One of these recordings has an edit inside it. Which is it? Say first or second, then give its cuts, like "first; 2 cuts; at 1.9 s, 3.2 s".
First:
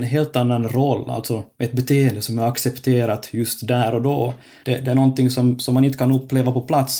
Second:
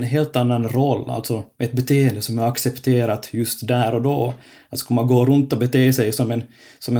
first; 1 cut; at 4.6 s